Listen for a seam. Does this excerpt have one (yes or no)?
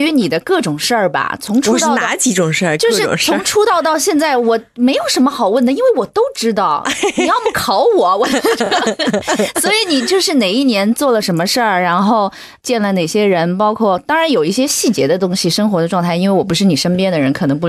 no